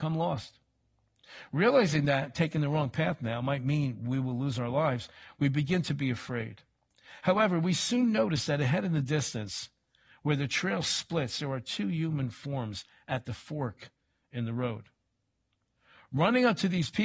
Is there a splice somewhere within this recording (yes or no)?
no